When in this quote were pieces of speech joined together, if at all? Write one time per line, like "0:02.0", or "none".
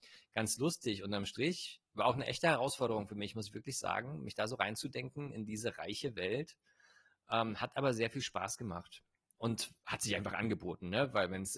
none